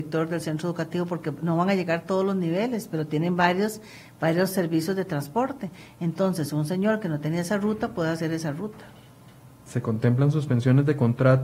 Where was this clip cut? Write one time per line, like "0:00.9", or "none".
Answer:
none